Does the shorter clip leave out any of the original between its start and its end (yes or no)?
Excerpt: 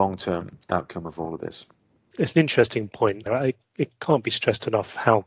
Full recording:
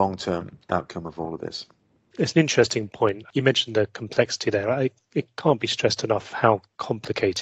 yes